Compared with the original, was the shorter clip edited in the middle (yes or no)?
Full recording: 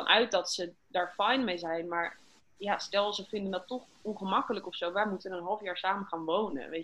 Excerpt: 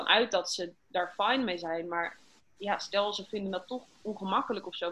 no